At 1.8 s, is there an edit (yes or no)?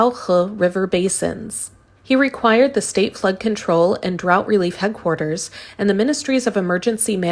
no